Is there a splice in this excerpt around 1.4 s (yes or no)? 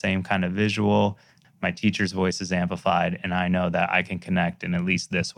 yes